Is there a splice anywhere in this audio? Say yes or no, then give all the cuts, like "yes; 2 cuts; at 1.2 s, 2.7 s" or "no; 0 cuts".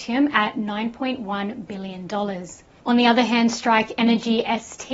no; 0 cuts